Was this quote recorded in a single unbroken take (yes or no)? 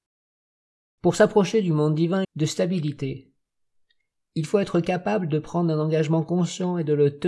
no